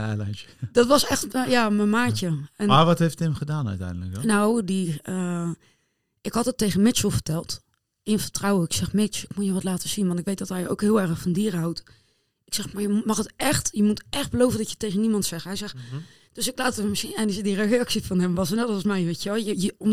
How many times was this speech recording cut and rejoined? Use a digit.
0